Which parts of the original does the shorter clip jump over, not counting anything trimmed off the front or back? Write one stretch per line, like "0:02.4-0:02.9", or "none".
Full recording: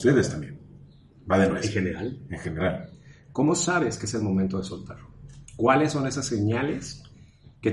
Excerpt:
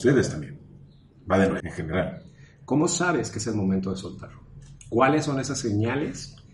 0:01.6-0:02.3